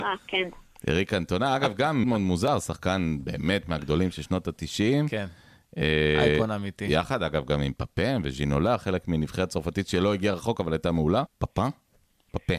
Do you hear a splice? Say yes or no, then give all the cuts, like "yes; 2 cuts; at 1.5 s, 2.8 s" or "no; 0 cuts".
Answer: yes; 2 cuts; at 2.0 s, 11.3 s